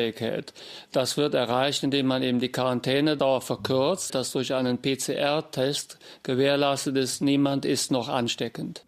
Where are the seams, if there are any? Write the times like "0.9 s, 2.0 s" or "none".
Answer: 4.1 s